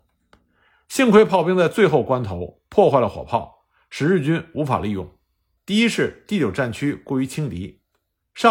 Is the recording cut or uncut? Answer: cut